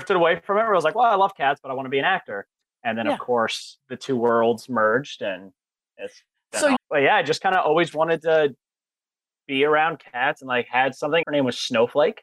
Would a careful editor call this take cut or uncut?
cut